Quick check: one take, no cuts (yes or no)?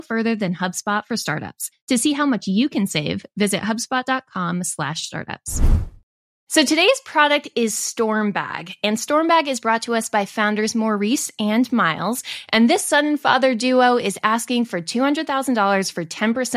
yes